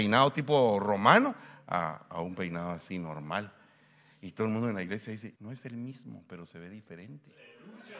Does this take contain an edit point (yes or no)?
yes